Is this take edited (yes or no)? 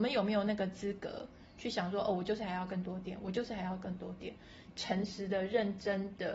yes